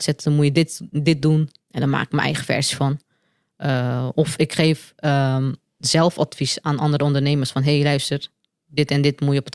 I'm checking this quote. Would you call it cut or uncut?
cut